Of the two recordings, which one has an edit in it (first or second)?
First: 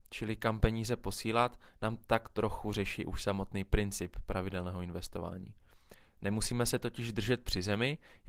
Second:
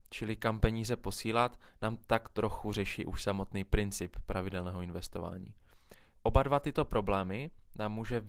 second